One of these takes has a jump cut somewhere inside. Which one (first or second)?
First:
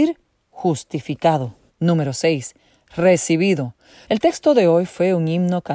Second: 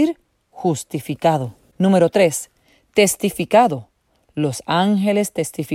first